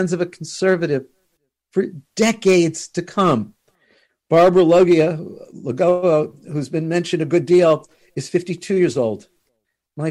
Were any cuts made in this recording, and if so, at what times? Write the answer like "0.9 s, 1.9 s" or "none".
4.1 s